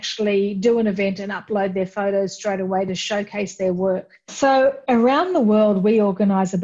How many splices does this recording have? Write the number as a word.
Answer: one